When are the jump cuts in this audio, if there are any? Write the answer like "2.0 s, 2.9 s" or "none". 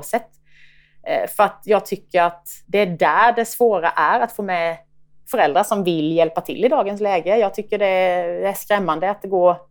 2.6 s